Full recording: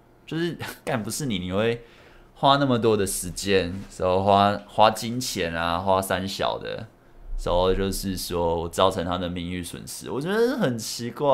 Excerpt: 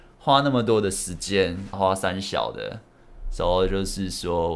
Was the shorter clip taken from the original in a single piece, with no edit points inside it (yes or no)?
no